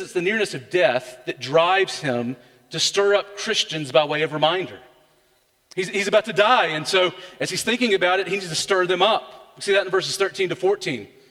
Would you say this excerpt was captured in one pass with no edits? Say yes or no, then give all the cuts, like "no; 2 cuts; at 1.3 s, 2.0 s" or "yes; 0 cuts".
yes; 0 cuts